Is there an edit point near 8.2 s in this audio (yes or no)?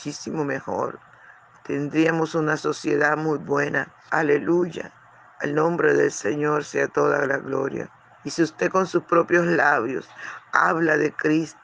yes